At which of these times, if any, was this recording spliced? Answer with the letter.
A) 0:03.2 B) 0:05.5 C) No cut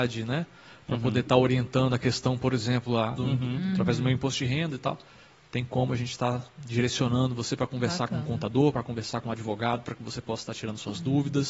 A